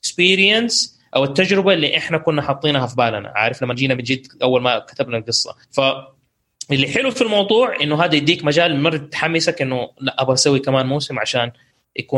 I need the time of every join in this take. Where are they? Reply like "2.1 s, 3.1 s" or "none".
5.6 s